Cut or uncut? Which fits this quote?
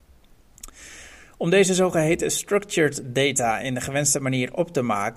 uncut